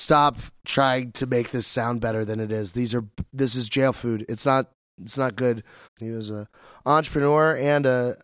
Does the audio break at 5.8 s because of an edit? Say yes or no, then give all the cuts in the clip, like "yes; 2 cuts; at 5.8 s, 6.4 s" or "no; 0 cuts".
yes; 1 cut; at 5.8 s